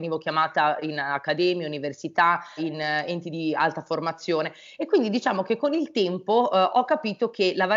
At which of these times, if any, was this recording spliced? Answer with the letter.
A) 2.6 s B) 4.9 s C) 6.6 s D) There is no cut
A